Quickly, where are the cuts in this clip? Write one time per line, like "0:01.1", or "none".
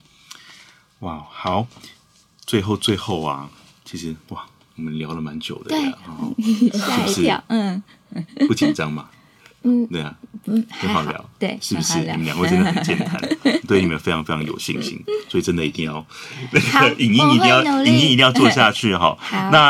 none